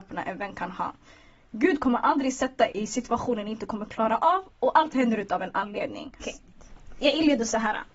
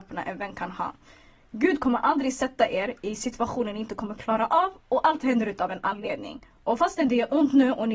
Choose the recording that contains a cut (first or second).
first